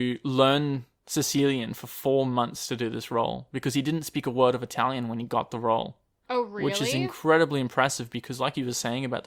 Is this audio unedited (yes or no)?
yes